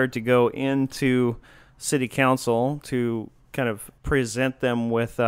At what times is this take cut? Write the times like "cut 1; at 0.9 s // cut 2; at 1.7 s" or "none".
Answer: cut 1; at 4.0 s